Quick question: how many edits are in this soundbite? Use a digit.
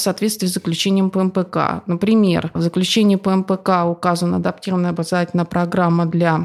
0